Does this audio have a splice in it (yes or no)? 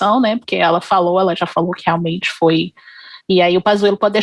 no